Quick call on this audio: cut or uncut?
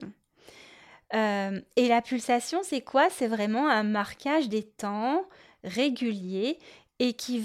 uncut